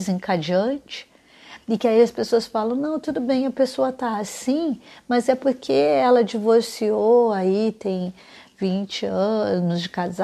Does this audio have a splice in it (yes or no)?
no